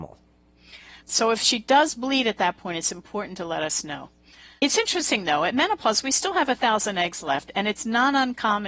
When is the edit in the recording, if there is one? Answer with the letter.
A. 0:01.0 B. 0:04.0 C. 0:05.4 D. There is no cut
A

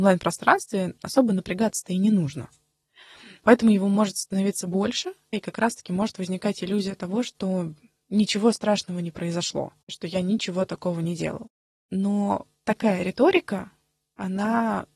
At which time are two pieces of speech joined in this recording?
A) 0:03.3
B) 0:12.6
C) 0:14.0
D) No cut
B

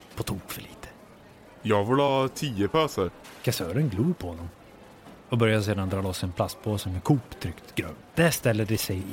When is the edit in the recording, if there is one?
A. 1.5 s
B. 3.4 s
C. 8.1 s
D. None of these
C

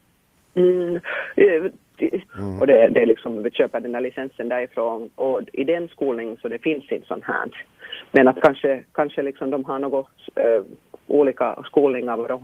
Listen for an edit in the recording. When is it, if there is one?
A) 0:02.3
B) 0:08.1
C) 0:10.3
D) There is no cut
A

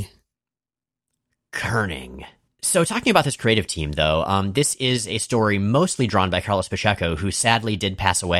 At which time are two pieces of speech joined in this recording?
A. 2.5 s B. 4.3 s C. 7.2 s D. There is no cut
A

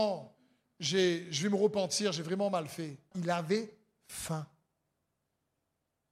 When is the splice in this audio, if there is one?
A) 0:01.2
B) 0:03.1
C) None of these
B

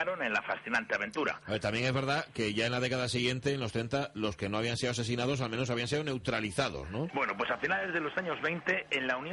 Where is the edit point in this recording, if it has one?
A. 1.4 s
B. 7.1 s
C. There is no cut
B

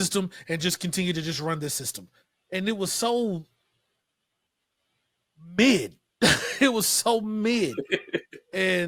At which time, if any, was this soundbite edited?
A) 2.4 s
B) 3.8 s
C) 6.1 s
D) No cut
D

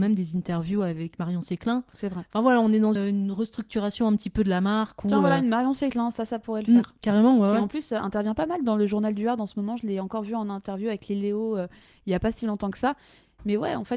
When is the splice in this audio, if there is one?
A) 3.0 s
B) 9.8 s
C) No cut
A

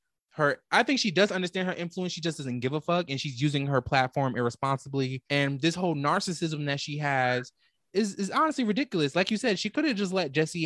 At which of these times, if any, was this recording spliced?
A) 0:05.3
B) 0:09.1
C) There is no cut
A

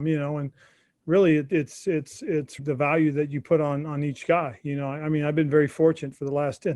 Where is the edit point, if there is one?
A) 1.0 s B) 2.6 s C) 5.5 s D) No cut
B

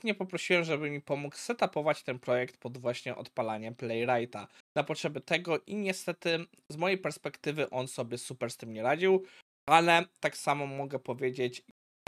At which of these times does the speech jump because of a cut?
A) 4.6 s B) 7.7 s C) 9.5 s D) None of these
A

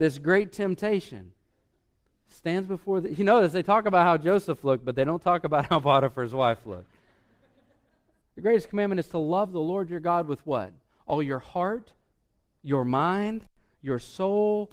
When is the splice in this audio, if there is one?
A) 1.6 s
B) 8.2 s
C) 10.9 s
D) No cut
B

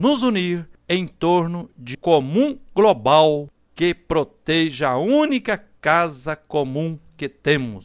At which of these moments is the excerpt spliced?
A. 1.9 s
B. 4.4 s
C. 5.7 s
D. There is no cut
A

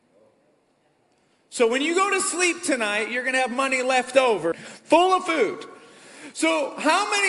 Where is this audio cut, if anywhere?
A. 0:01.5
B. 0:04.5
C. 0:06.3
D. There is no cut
B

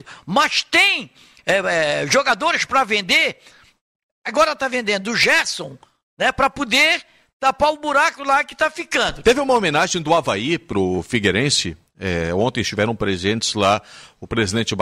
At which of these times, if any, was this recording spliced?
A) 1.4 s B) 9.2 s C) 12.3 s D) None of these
B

